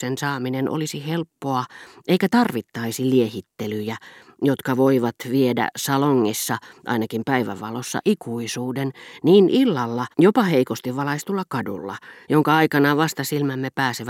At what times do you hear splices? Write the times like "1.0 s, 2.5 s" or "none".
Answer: 10.1 s, 12.2 s